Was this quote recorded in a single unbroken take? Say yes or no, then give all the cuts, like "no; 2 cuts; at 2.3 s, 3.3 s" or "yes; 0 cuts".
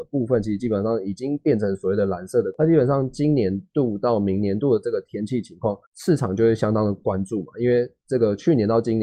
no; 1 cut; at 5.8 s